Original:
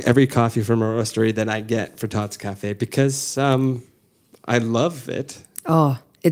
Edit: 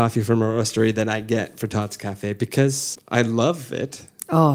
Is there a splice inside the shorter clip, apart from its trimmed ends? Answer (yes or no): yes